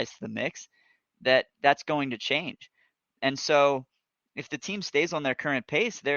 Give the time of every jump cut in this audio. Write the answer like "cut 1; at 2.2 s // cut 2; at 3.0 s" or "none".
none